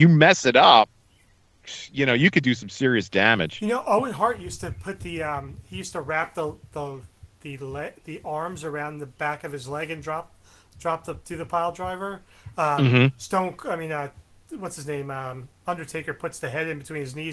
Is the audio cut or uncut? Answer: uncut